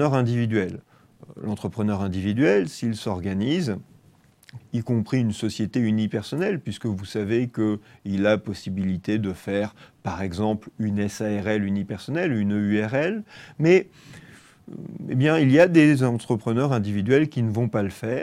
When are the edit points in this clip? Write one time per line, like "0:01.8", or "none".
0:04.6